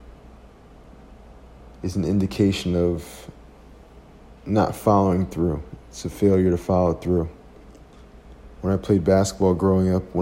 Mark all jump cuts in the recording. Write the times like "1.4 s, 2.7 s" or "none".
1.7 s